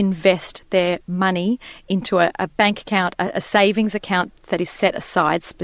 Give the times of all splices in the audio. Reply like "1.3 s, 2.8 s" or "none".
none